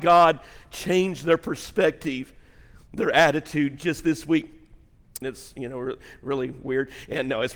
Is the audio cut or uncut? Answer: cut